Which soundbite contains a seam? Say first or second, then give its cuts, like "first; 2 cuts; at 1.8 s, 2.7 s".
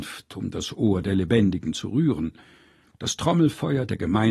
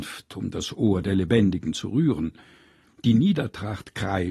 first; 1 cut; at 2.9 s